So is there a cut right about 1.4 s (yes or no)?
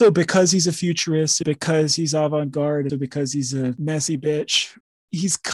yes